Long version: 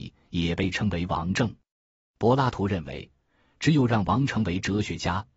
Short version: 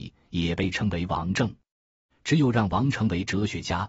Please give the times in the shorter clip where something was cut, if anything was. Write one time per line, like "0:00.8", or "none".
0:02.1